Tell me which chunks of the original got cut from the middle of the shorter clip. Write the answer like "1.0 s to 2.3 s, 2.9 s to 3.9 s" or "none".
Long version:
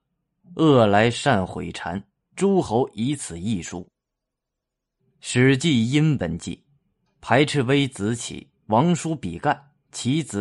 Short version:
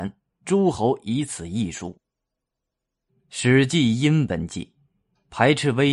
none